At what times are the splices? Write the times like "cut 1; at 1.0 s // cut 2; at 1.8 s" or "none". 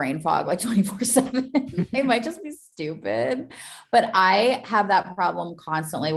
none